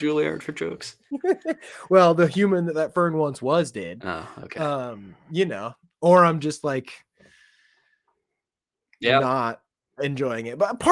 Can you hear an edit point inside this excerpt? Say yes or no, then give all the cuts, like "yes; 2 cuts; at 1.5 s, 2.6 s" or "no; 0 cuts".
no; 0 cuts